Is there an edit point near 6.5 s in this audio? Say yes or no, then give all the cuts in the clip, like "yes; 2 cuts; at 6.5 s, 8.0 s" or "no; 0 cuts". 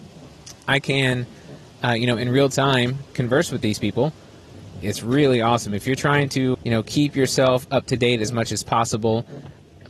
yes; 2 cuts; at 4.8 s, 6.5 s